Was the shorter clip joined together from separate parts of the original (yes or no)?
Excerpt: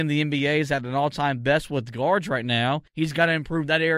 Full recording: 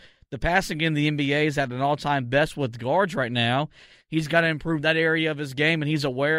yes